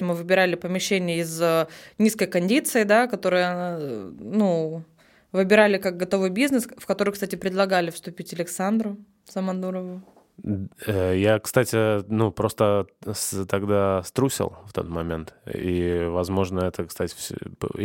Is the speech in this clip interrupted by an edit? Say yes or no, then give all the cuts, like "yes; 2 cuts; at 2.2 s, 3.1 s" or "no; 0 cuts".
no; 0 cuts